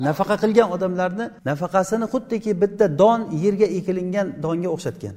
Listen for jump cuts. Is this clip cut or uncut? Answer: cut